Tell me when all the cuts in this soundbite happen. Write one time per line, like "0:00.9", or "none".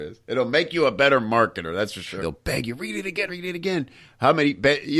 0:02.2
0:03.3